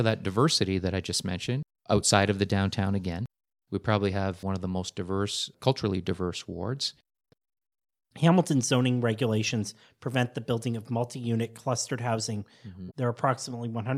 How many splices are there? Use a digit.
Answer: 2